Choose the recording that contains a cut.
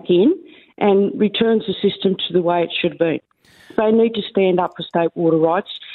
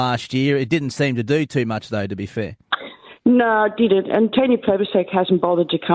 first; 1 cut; at 3.8 s

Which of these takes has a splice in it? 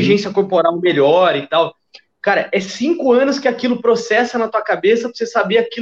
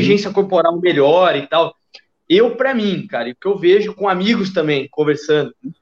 first; 1 cut; at 2.1 s

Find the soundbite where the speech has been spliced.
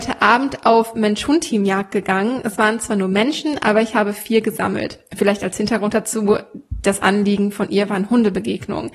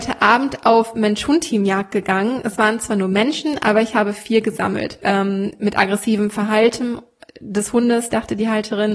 second; 1 cut; at 5.0 s

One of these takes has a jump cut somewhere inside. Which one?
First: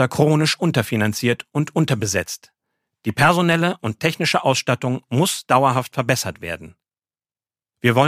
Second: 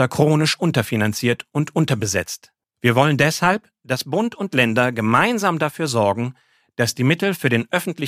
second; 1 cut; at 2.6 s

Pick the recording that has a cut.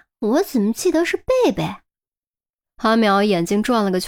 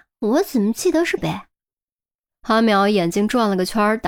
second; 1 cut; at 1.2 s

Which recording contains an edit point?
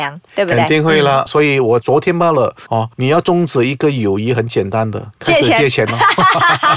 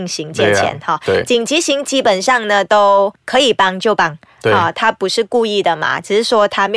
first; 2 cuts; at 1.3 s, 2.7 s

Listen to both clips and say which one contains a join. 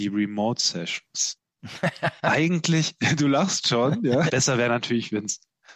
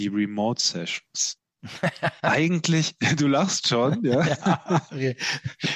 first; 1 cut; at 4.3 s

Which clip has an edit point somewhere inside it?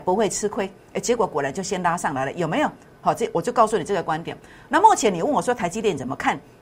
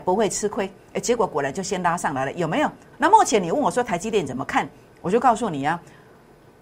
second; 1 cut; at 2.9 s

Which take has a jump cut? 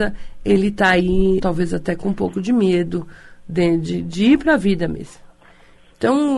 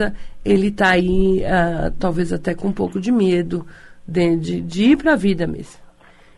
first; 1 cut; at 1.4 s

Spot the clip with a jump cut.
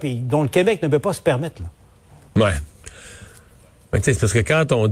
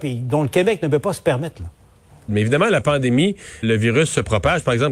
second; 2 cuts; at 2.3 s, 3.6 s

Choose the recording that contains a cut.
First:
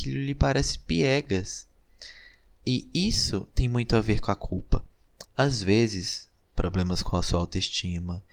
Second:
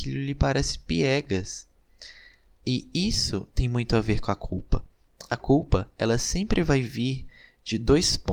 first; 2 cuts; at 5.2 s, 6.5 s

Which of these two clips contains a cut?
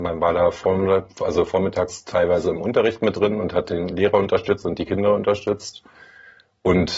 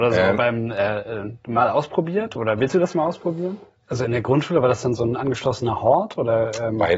second; 1 cut; at 3.8 s

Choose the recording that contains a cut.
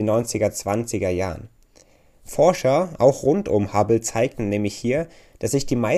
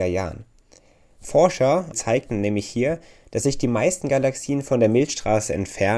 second; 1 cut; at 1.9 s

